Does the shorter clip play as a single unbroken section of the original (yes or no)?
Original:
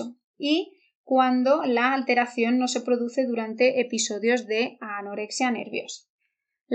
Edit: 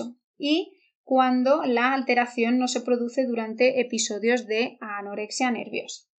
yes